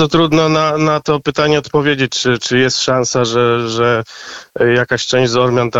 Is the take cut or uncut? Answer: uncut